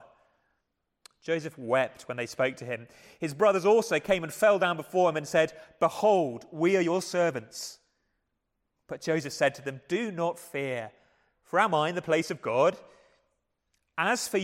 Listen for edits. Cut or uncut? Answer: uncut